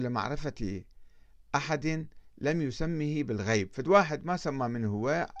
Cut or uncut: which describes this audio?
uncut